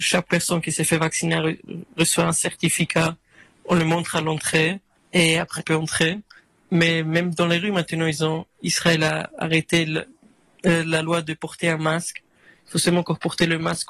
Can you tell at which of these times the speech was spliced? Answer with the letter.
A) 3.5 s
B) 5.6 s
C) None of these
B